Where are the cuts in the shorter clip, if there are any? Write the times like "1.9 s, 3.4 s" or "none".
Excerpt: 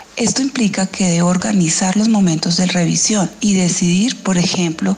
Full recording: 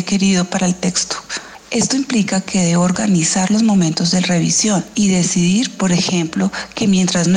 none